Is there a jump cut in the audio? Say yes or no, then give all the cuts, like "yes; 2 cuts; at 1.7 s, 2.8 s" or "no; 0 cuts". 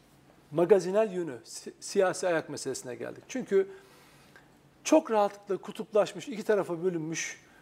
no; 0 cuts